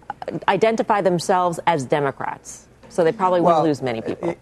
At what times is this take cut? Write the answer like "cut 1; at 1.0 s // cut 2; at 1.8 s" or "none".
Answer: cut 1; at 2.8 s